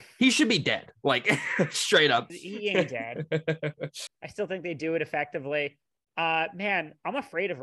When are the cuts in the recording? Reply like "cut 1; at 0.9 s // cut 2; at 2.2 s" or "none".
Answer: cut 1; at 2.3 s // cut 2; at 4.1 s